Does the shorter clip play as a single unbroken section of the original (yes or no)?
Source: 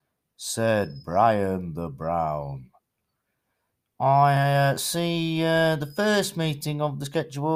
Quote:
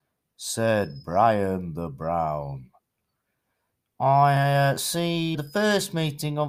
no